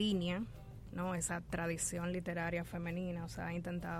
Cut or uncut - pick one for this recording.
uncut